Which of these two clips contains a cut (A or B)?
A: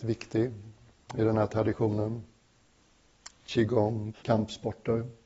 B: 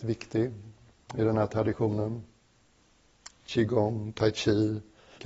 A